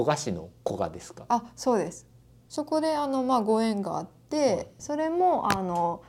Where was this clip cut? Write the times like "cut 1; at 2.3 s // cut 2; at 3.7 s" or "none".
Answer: cut 1; at 4.8 s